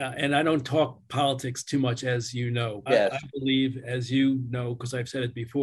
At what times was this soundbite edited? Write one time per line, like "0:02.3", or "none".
0:02.9